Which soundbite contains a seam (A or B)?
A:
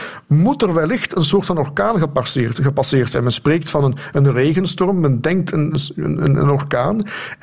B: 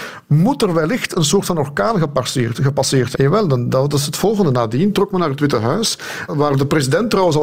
B